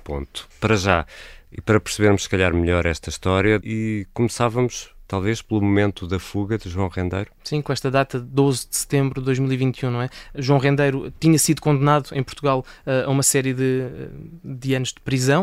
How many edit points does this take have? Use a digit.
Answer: 1